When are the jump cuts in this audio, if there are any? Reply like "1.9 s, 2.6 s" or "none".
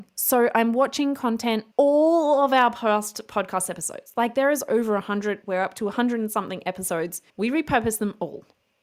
1.7 s, 5.4 s, 7.3 s